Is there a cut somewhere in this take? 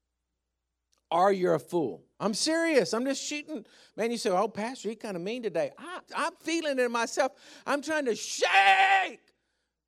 yes; 2 cuts; at 2.1 s, 6.1 s

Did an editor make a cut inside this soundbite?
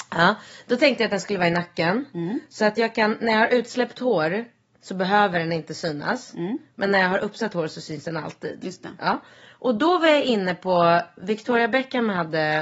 no; 0 cuts

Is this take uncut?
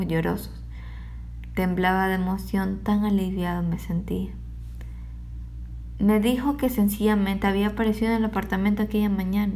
yes; 0 cuts

